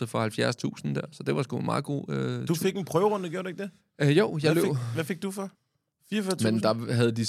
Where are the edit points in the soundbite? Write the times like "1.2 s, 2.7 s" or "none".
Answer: 5.5 s